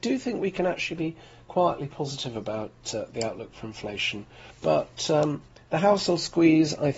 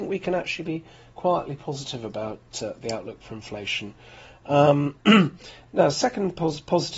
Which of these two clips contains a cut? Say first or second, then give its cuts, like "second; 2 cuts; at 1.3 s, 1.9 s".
first; 1 cut; at 4.5 s